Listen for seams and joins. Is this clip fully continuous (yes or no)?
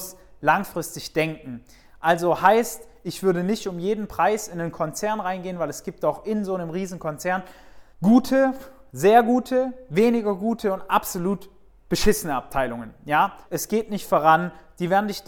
no